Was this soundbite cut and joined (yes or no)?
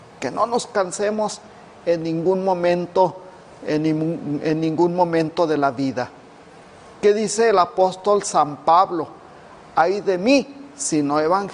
no